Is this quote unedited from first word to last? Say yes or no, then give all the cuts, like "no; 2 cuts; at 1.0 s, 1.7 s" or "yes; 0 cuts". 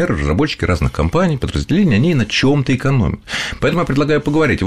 yes; 0 cuts